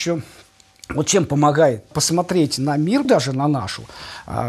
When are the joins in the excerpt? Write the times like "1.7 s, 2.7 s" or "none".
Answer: 1.9 s, 3.0 s

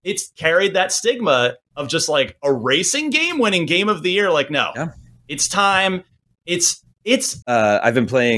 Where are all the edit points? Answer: 7.4 s

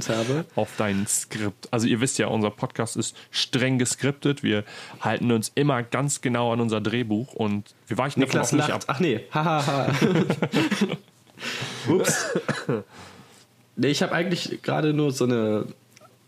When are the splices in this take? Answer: none

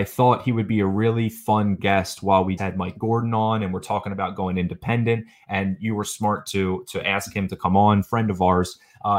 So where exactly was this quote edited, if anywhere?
2.6 s

